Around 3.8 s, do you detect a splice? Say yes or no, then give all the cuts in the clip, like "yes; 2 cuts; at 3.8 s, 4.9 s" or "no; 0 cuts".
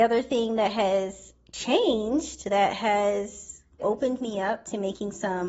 yes; 1 cut; at 3.8 s